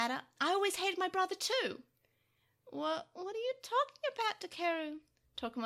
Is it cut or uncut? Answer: uncut